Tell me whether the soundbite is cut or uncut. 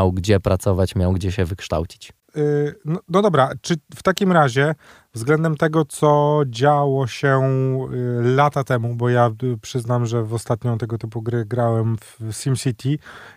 uncut